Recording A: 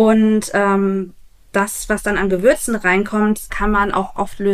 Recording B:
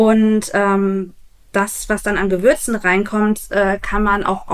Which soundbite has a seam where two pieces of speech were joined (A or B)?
A